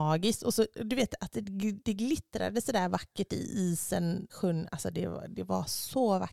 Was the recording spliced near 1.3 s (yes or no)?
no